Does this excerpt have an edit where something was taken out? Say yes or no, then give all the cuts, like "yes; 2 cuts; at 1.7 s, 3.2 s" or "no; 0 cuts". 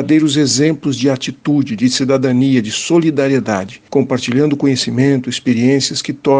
no; 0 cuts